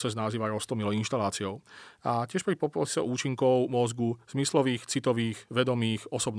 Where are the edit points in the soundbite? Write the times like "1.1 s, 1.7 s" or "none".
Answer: none

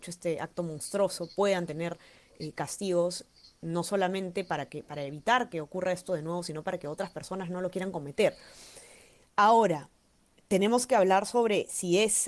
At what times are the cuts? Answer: 9.2 s

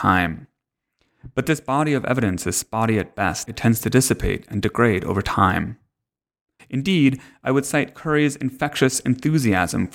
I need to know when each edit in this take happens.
3.5 s, 6.6 s

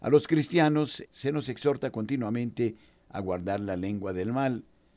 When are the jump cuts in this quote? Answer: 1.0 s

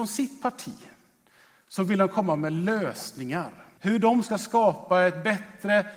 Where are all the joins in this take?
3.8 s

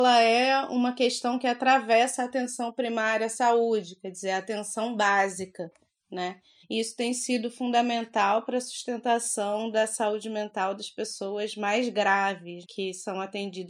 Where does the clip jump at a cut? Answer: 6.6 s, 12.6 s

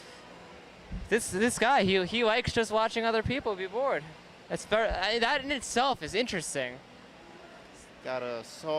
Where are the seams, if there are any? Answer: none

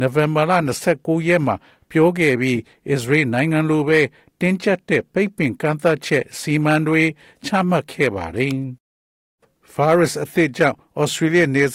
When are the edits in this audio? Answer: 8.8 s

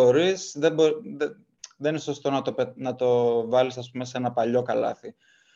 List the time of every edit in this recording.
none

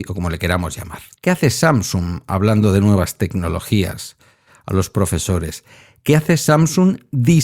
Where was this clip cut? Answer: 1.2 s

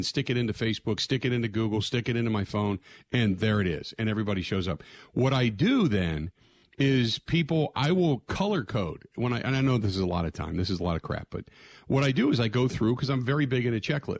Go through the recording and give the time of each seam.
none

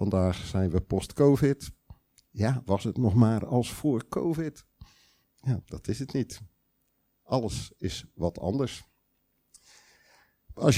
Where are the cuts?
5.6 s

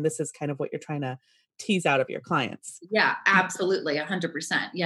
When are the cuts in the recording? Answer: none

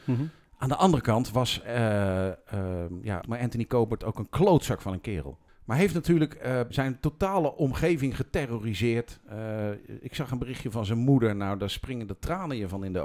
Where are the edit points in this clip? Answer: 3.2 s, 5.5 s, 6.7 s

